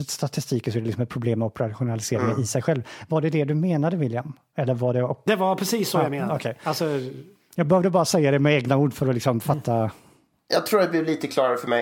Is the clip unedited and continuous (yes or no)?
yes